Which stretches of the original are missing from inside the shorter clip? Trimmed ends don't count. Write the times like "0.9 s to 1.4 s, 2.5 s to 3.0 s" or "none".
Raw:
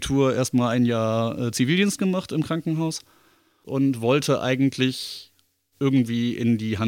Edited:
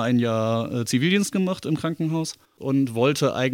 3.1 s to 3.5 s